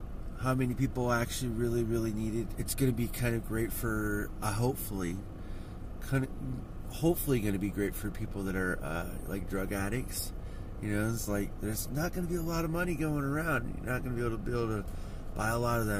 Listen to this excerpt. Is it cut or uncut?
cut